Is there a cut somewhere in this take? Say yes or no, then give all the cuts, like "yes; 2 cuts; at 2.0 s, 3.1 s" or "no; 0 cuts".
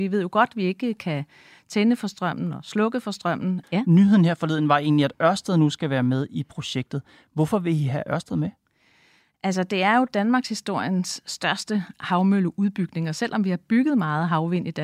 yes; 1 cut; at 3.6 s